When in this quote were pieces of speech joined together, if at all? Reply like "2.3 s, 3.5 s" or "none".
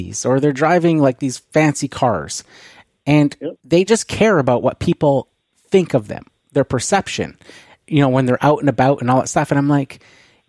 none